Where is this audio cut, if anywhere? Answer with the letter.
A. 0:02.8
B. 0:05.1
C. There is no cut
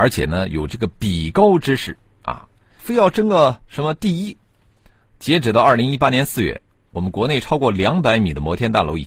A